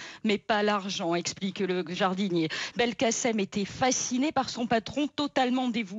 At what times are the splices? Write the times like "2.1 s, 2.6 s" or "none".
2.7 s